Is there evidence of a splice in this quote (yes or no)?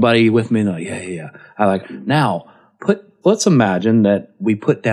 yes